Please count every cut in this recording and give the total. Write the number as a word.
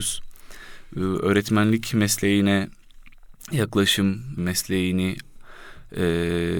one